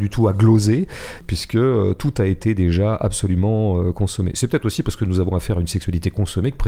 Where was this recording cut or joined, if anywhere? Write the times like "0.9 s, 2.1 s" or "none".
none

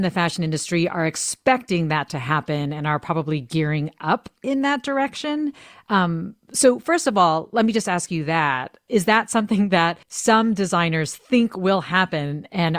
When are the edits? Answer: 10.0 s

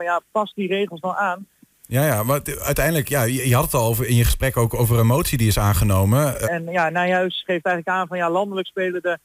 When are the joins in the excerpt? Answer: 1.7 s, 6.4 s

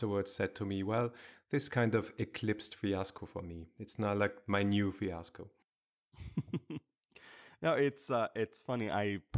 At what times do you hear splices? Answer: none

